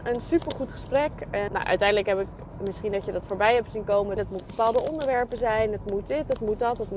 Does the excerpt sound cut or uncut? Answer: cut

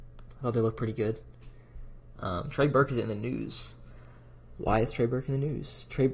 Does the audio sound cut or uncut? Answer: cut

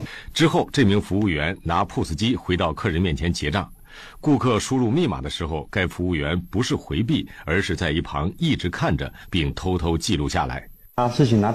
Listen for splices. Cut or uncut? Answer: uncut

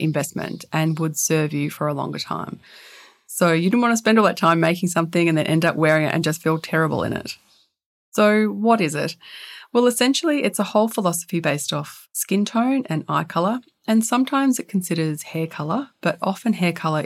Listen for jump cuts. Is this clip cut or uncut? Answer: uncut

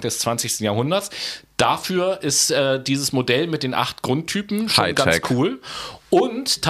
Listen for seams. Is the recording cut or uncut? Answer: uncut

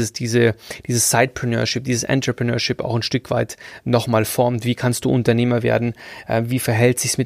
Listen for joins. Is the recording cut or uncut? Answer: uncut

